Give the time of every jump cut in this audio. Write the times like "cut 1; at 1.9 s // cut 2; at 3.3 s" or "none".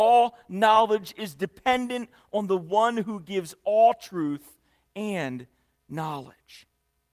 none